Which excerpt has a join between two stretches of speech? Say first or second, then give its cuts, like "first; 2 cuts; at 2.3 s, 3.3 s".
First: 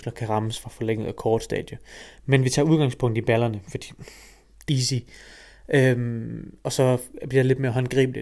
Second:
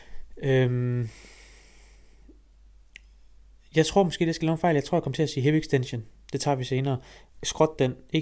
first; 1 cut; at 4.7 s